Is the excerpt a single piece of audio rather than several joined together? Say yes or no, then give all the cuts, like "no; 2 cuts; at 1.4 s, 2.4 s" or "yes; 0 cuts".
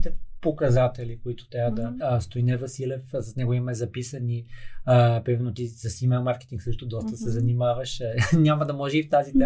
no; 1 cut; at 2.0 s